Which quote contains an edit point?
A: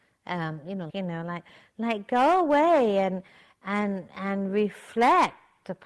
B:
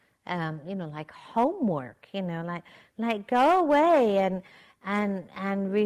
A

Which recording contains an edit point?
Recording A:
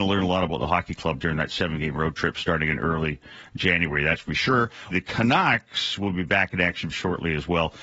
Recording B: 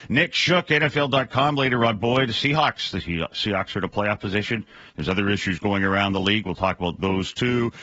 A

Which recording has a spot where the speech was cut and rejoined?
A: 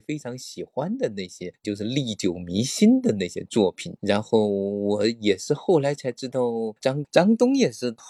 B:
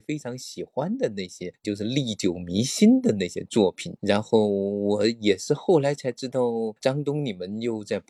A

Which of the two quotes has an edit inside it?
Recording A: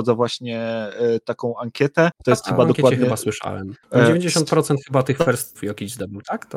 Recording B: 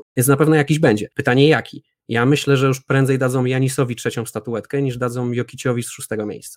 A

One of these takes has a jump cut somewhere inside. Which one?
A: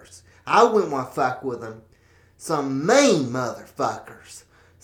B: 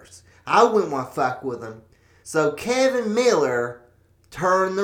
B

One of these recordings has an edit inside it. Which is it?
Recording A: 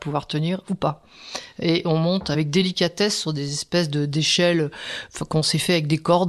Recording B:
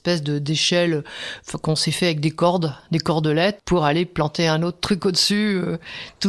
B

